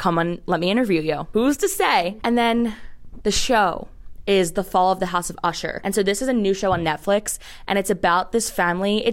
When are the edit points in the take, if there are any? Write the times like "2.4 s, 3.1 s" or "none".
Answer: none